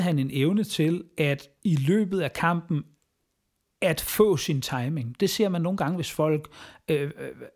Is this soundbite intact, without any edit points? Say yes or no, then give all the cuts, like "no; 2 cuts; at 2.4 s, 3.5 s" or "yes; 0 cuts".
yes; 0 cuts